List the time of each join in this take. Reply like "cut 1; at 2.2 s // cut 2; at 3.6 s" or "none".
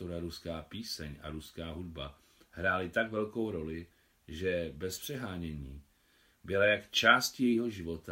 none

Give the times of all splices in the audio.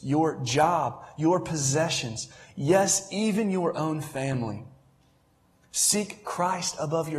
none

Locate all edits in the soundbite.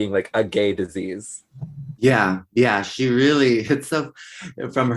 cut 1; at 2.0 s

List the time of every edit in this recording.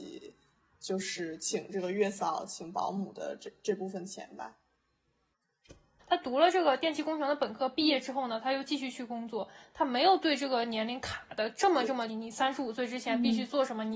cut 1; at 6.0 s // cut 2; at 12.1 s

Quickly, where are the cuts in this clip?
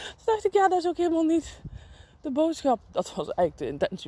cut 1; at 2.8 s

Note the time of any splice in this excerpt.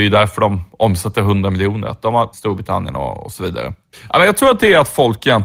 cut 1; at 2.3 s // cut 2; at 3.9 s

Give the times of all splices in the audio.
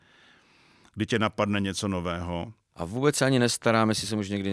cut 1; at 2.7 s

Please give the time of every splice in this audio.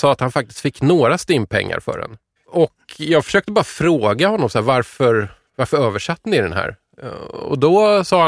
cut 1; at 2.4 s

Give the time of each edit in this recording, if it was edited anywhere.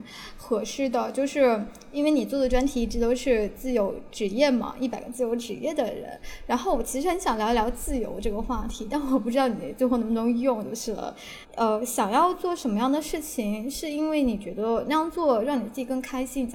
cut 1; at 11.4 s

